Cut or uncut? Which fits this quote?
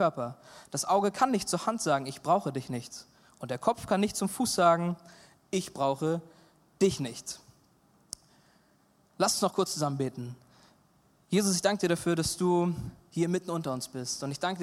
uncut